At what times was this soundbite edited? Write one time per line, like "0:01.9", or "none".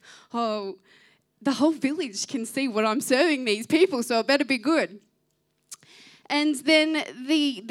none